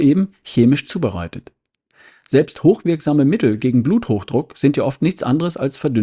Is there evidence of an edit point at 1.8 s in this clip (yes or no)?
no